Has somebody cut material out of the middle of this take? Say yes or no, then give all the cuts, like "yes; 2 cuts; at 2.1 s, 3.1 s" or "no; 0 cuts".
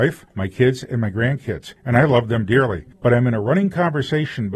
no; 0 cuts